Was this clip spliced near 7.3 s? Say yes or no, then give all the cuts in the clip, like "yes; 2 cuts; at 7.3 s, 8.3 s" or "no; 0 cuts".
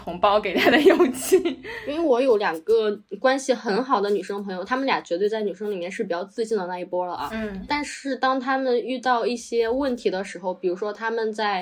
no; 0 cuts